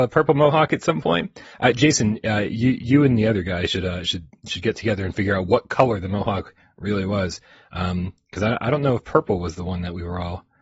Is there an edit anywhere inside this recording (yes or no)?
no